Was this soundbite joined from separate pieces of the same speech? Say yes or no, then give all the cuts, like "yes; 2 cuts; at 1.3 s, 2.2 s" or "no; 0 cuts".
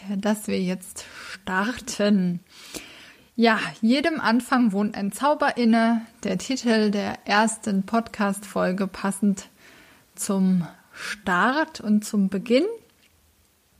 no; 0 cuts